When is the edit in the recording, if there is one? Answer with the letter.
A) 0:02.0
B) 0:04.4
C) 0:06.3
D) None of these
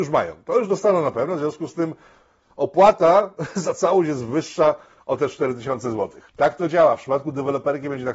C